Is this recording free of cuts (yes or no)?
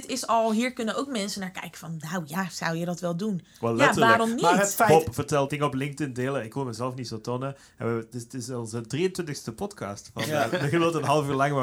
no